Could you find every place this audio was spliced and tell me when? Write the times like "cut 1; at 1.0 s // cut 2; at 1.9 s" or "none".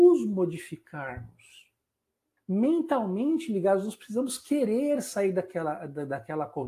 cut 1; at 2.4 s